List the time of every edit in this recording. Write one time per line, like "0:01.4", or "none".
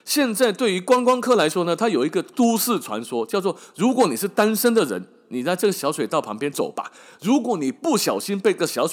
0:06.5